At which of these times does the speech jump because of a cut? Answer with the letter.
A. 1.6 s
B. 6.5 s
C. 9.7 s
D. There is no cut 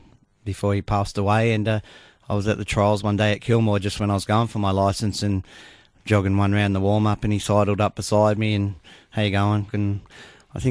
C